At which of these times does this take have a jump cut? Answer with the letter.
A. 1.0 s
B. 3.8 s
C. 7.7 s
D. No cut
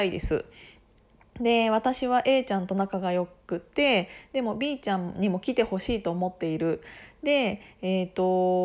D